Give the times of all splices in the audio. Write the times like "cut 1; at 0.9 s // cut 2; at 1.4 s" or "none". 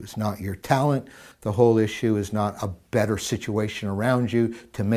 cut 1; at 1.3 s